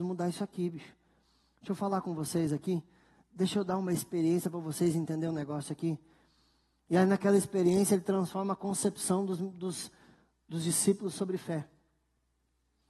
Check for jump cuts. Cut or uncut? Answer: uncut